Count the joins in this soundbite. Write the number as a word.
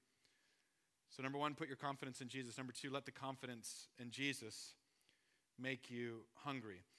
zero